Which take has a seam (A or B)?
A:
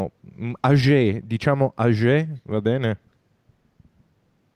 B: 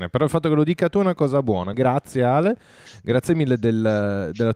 B